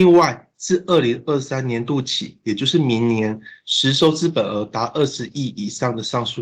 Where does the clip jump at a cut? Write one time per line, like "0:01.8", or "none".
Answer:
none